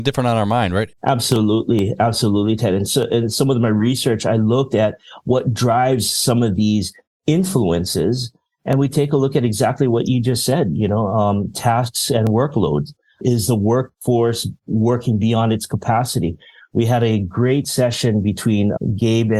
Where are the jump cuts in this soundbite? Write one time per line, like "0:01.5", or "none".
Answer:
0:00.9